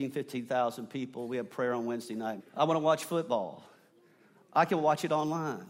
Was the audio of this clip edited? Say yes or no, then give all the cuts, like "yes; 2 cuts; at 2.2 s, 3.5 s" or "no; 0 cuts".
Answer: yes; 1 cut; at 2.4 s